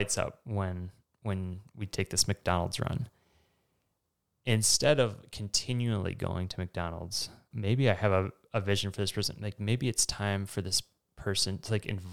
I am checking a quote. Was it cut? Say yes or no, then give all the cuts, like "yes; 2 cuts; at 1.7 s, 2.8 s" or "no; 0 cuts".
no; 0 cuts